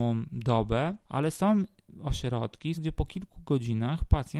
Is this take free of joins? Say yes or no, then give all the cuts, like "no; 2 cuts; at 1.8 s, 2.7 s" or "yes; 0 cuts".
no; 2 cuts; at 1.0 s, 2.7 s